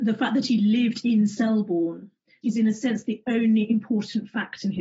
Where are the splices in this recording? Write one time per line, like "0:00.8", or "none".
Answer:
0:02.4